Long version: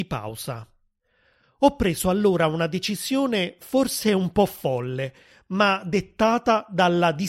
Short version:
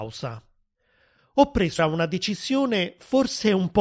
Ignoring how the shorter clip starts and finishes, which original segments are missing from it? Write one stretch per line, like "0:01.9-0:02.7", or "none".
0:02.0-0:02.4